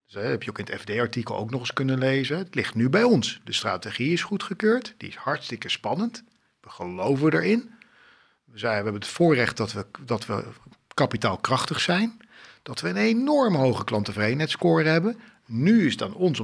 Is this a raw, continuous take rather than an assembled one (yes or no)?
yes